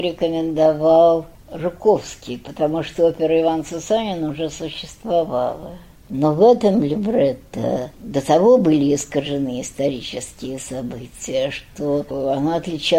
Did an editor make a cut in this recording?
yes; 2 cuts; at 6.0 s, 7.9 s

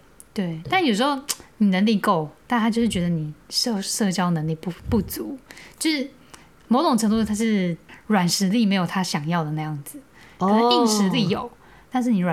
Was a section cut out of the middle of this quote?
no; 0 cuts

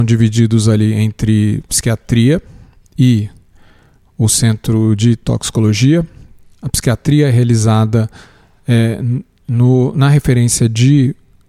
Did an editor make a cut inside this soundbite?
no; 0 cuts

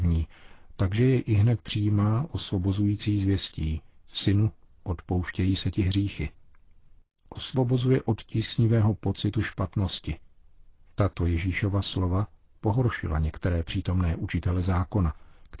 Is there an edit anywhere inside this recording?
no; 0 cuts

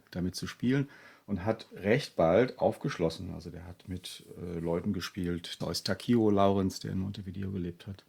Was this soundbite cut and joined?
yes; 1 cut; at 5.6 s

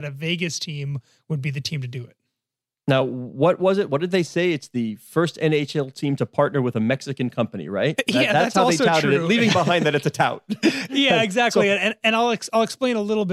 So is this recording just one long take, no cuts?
yes; 0 cuts

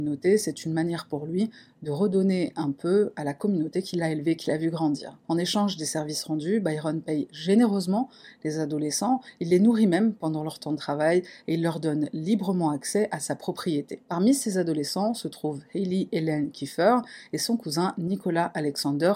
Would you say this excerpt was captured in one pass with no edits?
yes; 0 cuts

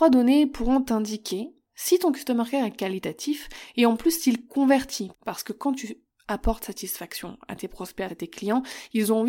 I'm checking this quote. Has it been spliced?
yes; 2 cuts; at 5.1 s, 8.1 s

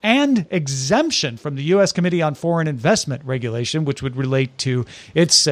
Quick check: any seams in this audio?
no; 0 cuts

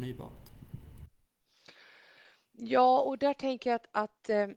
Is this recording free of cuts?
yes; 0 cuts

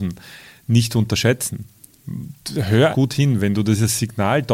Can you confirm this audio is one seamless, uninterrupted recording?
no; 1 cut; at 2.9 s

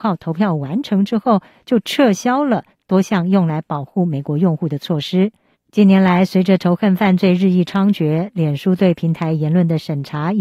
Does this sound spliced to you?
yes; 1 cut; at 5.5 s

